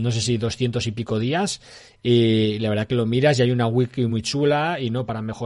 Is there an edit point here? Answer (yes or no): no